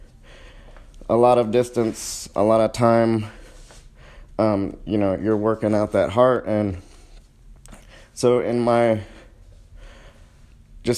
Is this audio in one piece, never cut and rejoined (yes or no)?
yes